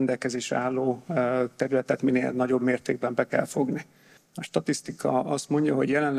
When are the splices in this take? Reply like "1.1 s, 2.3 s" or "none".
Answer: 4.2 s